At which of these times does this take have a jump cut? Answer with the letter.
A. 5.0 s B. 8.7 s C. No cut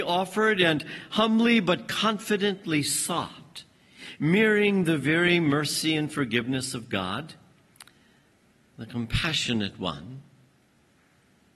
C